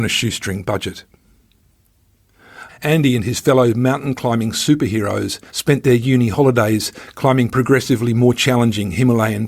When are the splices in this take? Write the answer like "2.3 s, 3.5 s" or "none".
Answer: 2.7 s, 5.5 s